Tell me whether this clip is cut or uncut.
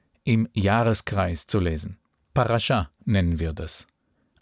uncut